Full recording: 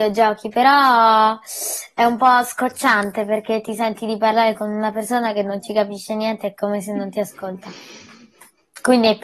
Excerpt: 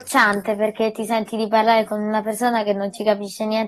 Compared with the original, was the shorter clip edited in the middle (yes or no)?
no